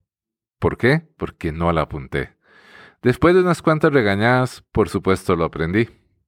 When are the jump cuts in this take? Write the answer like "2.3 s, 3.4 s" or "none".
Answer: none